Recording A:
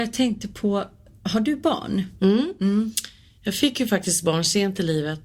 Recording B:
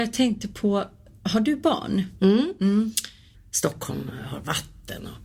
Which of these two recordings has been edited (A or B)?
B